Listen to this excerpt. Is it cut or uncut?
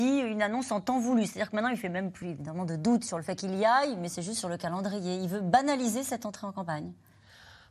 cut